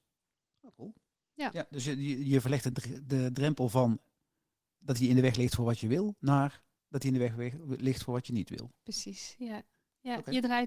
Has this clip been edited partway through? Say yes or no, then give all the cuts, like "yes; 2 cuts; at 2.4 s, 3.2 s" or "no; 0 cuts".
no; 0 cuts